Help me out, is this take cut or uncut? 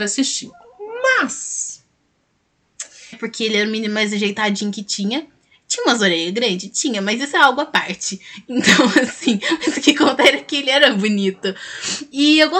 cut